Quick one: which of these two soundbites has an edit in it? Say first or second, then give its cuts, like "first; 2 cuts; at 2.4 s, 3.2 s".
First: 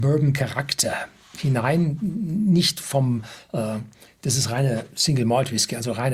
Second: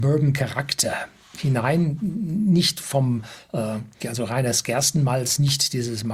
second; 1 cut; at 4.0 s